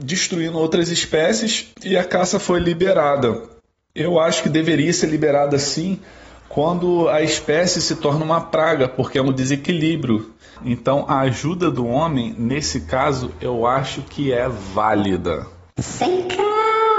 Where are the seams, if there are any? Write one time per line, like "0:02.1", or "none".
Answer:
none

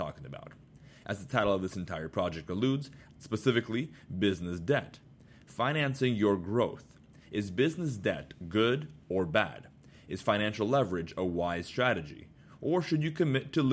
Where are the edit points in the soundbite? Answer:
0:03.1

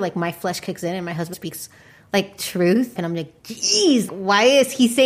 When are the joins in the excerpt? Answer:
0:01.3
0:03.0
0:04.1

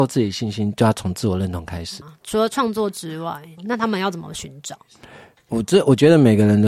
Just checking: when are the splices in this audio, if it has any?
0:02.0
0:03.6

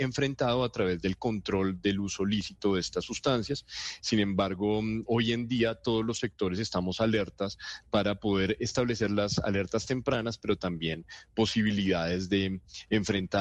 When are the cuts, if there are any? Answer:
0:04.0
0:05.1

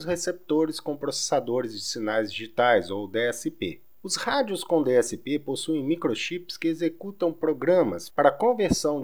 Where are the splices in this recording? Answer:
0:08.1

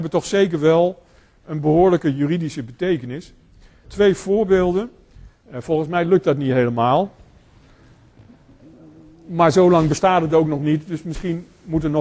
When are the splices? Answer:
0:03.8
0:05.4

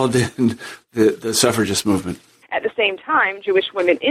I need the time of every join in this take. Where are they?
0:02.4

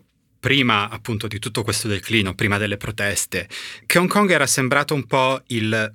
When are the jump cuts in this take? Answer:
none

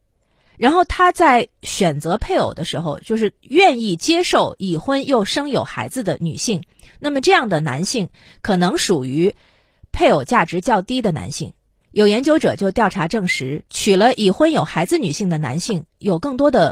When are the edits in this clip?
0:11.8
0:13.7

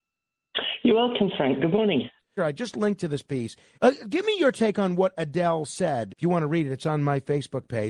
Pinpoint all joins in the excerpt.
0:02.4
0:03.8
0:06.1

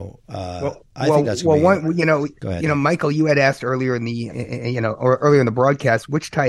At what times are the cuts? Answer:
0:02.4
0:04.3

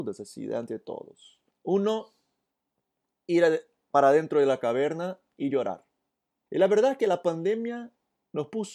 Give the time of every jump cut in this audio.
0:01.5
0:06.5

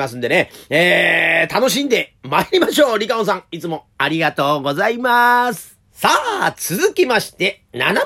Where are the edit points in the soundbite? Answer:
0:05.8

